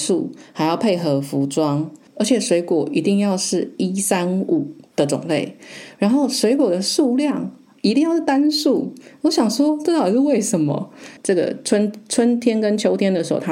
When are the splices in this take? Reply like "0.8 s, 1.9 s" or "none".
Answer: 2.1 s, 11.2 s